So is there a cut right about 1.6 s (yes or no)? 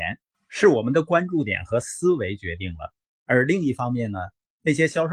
no